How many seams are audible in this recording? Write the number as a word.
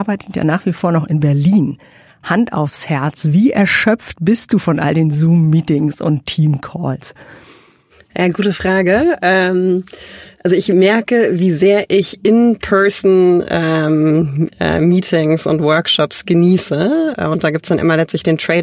one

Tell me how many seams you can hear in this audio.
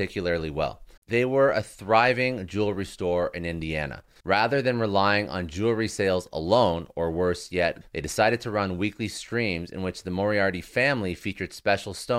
three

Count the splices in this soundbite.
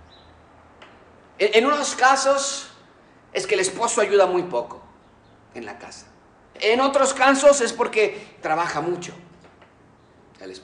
one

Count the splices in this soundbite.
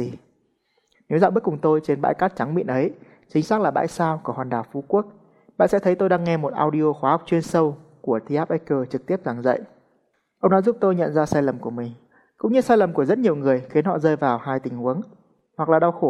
one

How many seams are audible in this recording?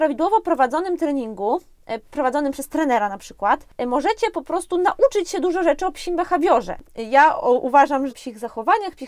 two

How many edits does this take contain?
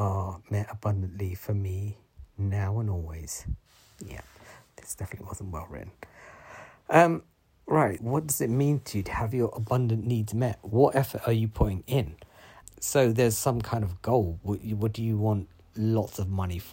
two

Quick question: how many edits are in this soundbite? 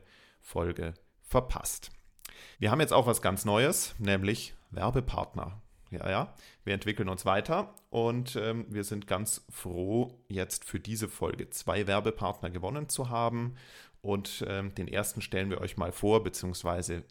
one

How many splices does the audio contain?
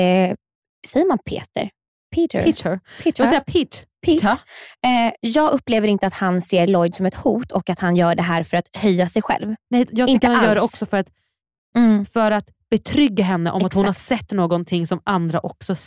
one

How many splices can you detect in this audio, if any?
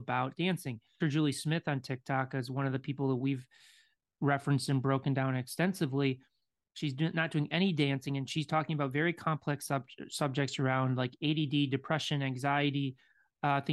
one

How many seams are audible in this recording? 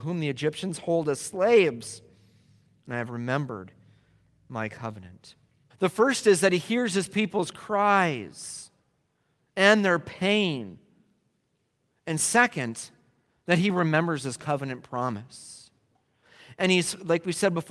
one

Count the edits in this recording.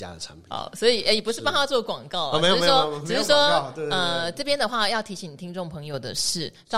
zero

